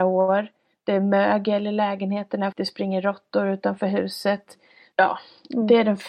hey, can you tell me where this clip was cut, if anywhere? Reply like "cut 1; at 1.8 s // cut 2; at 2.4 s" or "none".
cut 1; at 2.5 s // cut 2; at 4.9 s

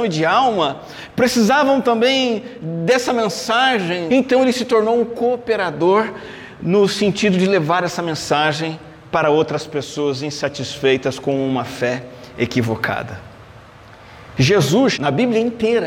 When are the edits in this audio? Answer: cut 1; at 4.1 s // cut 2; at 14.9 s

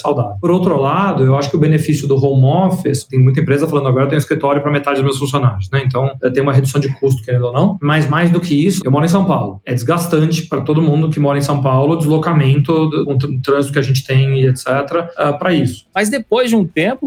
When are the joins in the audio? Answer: cut 1; at 8.8 s // cut 2; at 15.9 s

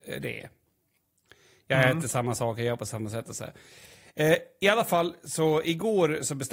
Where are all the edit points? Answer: none

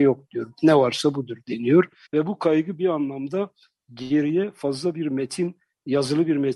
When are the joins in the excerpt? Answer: cut 1; at 2.1 s

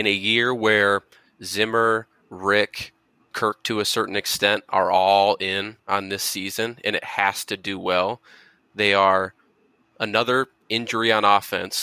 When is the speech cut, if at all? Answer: cut 1; at 3.3 s

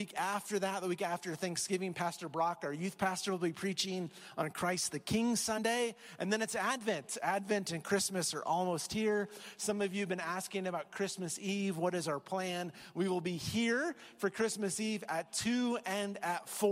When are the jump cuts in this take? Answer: none

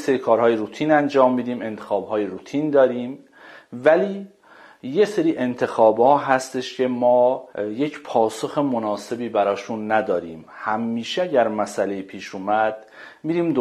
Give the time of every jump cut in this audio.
cut 1; at 7.5 s

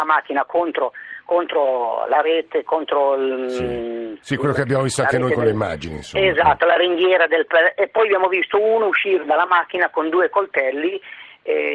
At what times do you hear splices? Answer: none

